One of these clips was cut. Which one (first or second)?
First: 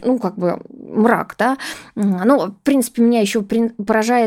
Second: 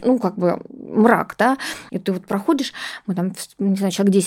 second